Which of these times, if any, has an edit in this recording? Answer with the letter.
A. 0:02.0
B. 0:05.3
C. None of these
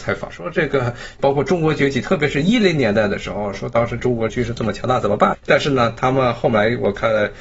B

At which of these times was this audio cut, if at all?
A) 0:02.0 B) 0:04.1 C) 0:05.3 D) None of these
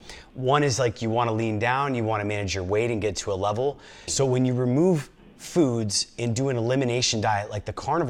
B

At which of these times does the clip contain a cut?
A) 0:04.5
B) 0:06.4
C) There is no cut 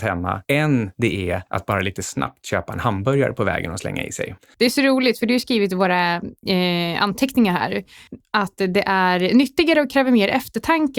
A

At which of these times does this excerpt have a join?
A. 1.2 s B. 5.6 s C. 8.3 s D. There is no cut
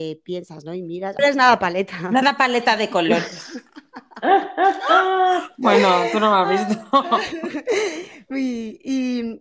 A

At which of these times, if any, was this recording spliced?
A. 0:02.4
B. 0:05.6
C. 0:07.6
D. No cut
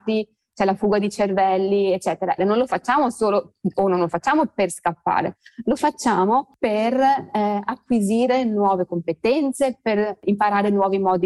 A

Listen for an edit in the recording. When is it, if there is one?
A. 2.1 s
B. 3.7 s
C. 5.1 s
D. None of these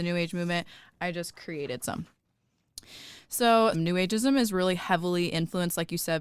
B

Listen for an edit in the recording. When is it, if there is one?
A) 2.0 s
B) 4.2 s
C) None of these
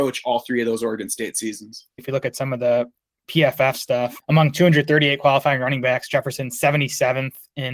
A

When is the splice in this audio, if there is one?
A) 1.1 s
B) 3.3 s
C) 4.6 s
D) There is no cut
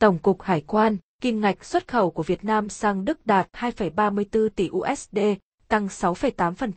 A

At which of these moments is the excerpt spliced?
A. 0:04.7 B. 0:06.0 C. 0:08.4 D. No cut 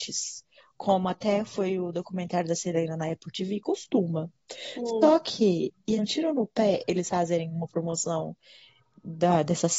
B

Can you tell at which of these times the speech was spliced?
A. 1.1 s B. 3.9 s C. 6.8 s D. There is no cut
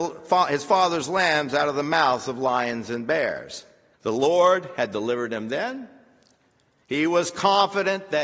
B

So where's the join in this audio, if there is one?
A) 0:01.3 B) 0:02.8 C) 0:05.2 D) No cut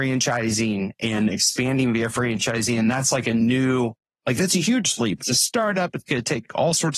C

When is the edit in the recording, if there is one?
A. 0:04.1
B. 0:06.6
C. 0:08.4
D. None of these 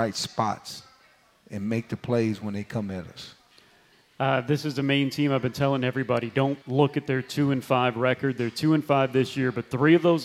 B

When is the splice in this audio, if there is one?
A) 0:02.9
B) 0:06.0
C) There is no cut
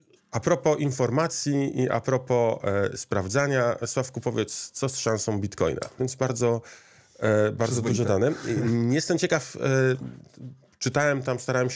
B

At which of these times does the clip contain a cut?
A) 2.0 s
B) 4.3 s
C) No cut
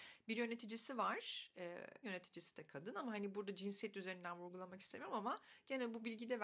A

